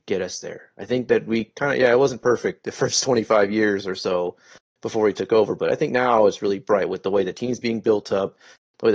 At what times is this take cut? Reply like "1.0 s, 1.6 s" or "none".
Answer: none